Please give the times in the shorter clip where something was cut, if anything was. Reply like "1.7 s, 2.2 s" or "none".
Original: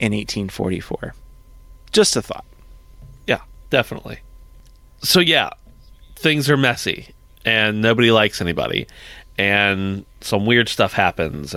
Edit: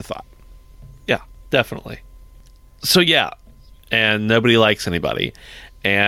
3.8 s